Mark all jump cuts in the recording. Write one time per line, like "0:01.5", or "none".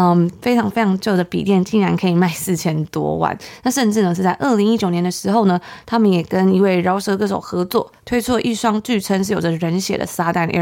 none